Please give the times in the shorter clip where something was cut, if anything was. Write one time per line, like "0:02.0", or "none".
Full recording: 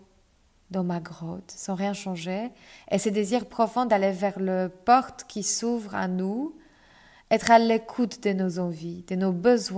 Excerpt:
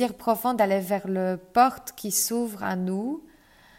none